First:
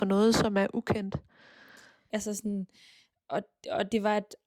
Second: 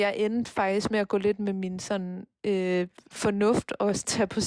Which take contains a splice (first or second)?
first